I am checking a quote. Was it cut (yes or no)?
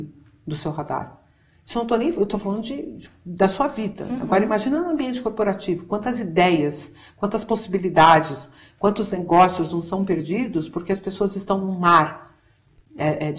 no